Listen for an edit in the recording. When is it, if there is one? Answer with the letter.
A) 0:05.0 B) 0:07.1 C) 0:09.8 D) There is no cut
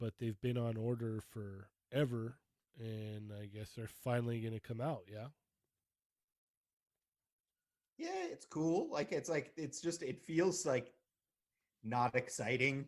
D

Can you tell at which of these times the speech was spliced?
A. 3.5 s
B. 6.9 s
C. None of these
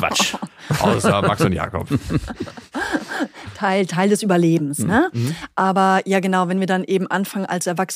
C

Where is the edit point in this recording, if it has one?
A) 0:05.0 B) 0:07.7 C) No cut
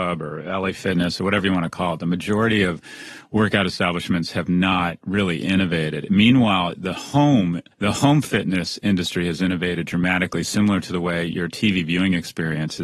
B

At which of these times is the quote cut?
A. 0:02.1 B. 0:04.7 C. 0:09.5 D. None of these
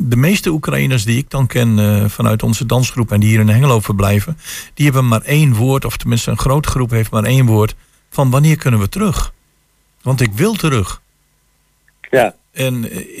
D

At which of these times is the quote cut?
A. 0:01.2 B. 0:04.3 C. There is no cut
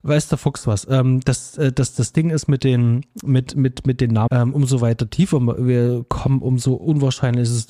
B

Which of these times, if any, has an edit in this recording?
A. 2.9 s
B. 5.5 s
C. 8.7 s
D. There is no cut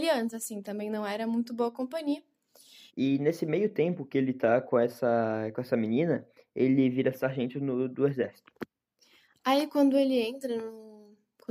A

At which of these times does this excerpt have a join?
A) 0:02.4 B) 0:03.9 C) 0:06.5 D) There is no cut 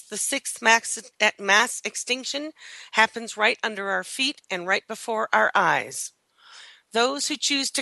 D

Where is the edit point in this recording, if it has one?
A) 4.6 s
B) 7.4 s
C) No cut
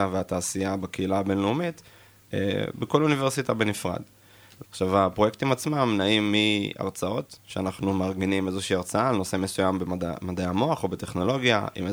A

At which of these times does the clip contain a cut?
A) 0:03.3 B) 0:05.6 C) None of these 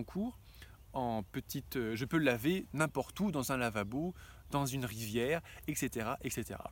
C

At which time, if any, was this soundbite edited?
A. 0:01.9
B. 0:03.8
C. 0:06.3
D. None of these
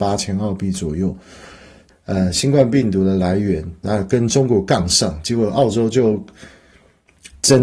A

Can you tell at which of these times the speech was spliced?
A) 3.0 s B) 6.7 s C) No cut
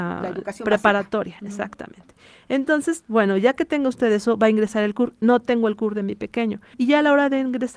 B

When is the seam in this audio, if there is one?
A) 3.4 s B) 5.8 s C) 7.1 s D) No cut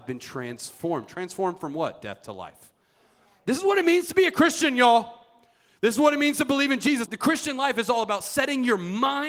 C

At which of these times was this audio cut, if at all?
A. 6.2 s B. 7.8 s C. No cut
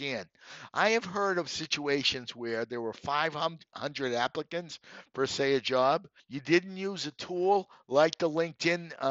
A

